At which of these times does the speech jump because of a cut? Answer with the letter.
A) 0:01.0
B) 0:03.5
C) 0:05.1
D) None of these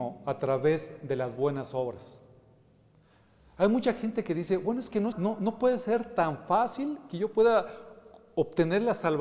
C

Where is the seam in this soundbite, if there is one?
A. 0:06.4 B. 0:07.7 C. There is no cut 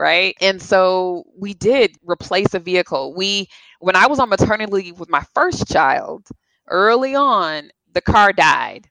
B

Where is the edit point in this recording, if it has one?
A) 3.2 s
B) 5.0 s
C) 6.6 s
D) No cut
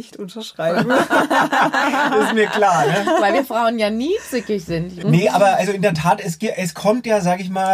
B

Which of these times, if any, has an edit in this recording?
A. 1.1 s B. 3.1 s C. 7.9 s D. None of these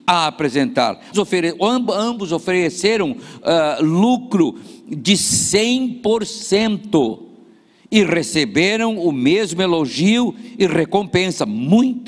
A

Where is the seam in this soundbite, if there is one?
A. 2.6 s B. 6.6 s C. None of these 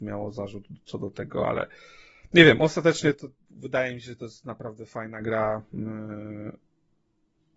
C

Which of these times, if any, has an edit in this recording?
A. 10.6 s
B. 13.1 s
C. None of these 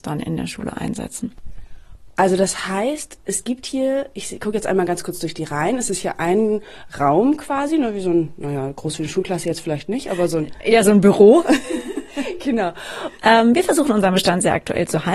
B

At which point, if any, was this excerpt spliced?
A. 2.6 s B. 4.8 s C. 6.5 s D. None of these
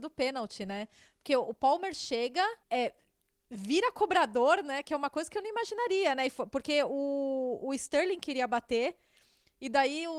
A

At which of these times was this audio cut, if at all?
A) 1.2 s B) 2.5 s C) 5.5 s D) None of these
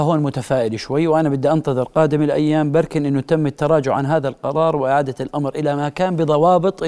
D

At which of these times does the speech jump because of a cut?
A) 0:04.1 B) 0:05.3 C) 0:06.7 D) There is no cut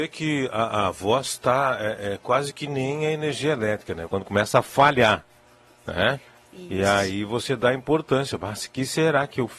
A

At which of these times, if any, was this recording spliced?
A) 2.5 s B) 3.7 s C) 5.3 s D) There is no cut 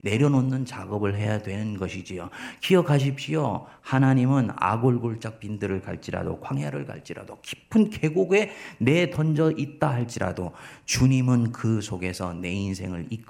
D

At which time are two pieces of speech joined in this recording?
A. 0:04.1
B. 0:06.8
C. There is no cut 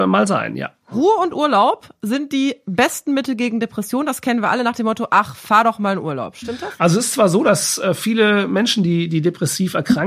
B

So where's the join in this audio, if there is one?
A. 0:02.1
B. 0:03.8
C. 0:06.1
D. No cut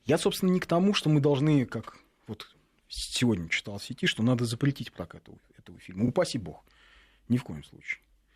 D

